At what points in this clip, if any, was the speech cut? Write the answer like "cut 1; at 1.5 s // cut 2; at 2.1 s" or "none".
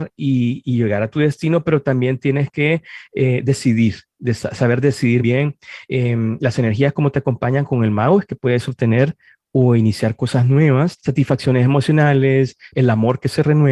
cut 1; at 5.2 s // cut 2; at 11.0 s // cut 3; at 12.7 s